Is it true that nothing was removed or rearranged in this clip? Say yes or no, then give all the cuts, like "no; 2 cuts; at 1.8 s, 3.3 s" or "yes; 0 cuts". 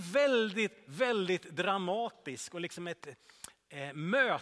no; 1 cut; at 3.0 s